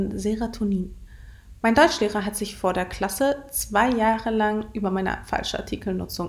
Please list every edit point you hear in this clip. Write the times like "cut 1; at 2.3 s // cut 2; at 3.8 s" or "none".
none